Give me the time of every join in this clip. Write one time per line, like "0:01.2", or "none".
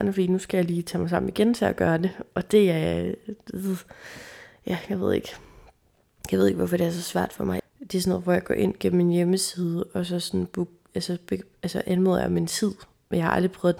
0:07.6

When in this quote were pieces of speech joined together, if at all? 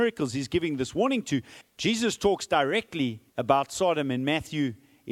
0:01.6
0:03.3

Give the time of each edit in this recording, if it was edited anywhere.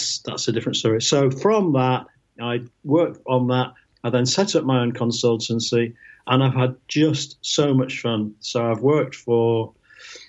none

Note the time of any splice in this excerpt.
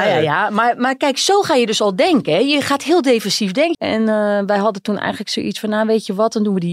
0:03.7

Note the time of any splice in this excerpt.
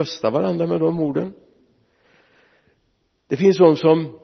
none

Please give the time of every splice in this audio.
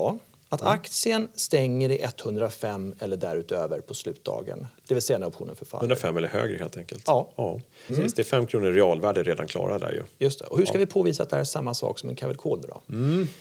0:07.9

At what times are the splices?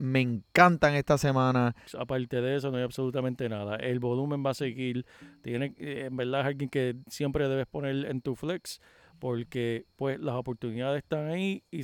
0:01.9

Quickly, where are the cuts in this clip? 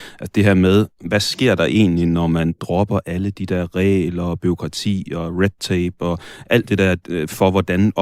none

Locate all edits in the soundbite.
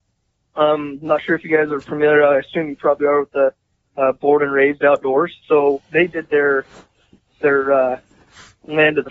0:05.4

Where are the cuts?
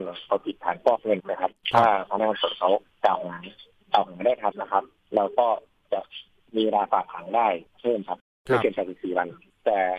0:01.2
0:04.5

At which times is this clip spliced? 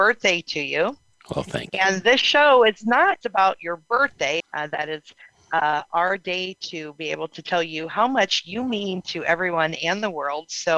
0:03.2
0:04.4

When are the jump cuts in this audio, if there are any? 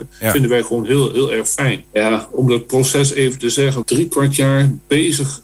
0:01.8
0:03.8

